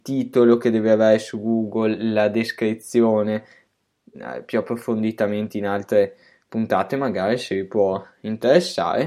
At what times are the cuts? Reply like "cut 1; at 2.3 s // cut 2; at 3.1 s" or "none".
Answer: cut 1; at 4.1 s